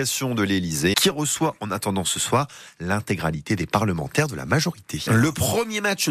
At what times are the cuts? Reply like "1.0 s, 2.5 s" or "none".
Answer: 0.9 s, 5.1 s